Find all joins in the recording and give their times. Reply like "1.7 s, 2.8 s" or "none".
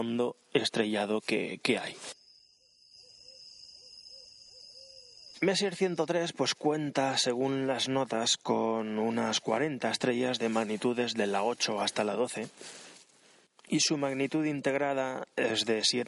none